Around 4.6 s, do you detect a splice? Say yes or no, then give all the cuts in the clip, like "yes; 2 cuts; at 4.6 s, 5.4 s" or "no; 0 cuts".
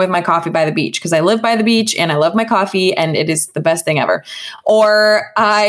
no; 0 cuts